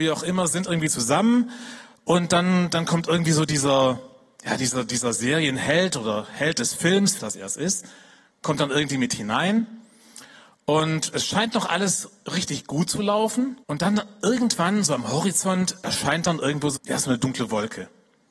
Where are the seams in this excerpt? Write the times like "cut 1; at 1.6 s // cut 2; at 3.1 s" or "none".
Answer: cut 1; at 7.2 s // cut 2; at 13.6 s // cut 3; at 16.7 s

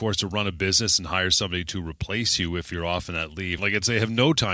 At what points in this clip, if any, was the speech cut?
cut 1; at 3.6 s

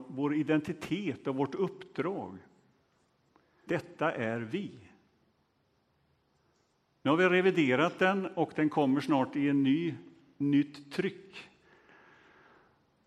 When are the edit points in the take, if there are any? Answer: cut 1; at 3.7 s

